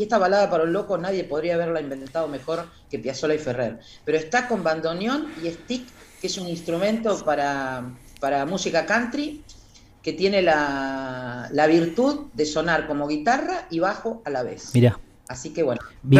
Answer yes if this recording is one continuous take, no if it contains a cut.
yes